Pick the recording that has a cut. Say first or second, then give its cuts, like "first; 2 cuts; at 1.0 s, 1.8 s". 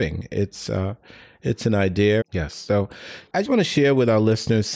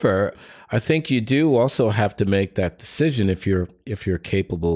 first; 2 cuts; at 2.2 s, 3.4 s